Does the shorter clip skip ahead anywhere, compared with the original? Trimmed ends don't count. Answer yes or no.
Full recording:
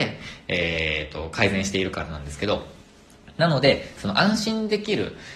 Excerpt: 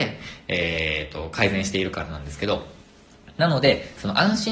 no